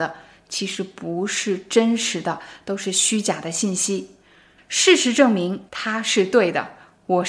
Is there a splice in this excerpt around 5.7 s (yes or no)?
yes